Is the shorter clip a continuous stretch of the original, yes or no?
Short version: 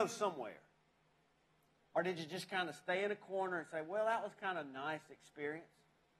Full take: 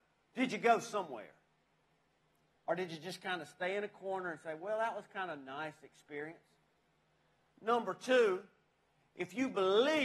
yes